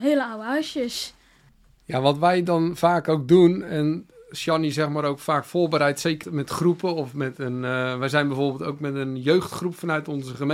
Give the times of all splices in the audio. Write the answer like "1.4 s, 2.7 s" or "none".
6.2 s